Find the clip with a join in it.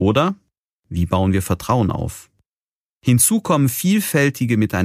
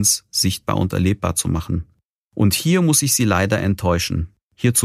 first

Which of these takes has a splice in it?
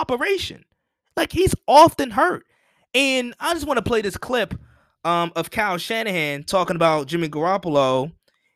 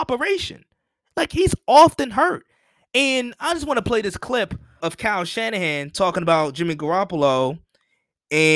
second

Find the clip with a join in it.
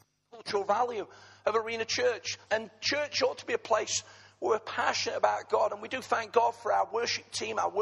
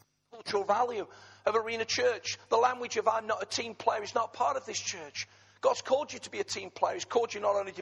first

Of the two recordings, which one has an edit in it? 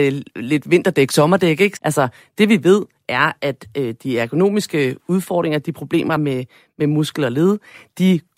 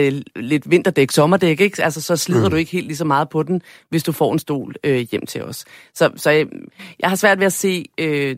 first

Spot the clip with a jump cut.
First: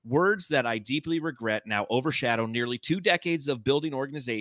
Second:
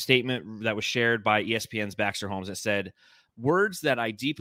second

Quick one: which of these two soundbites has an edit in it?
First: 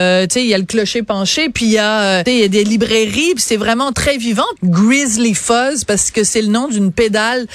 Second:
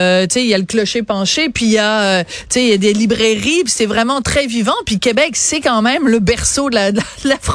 first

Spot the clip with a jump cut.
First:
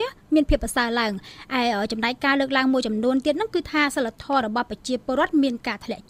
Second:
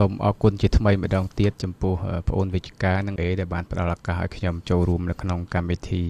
second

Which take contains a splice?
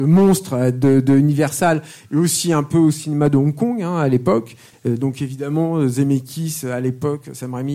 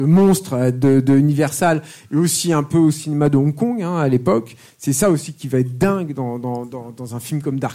first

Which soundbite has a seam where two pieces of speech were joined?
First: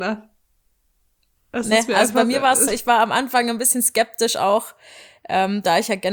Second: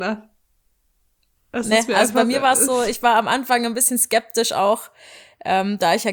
first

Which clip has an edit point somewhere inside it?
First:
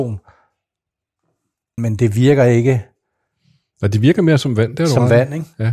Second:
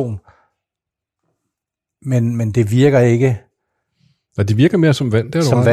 first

